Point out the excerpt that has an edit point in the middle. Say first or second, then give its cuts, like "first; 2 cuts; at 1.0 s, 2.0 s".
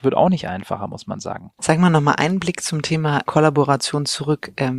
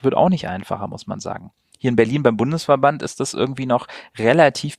first; 2 cuts; at 1.6 s, 3.3 s